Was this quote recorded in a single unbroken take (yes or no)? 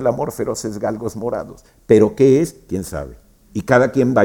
yes